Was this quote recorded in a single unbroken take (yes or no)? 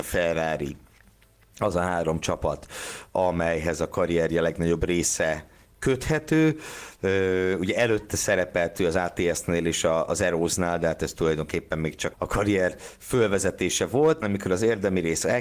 no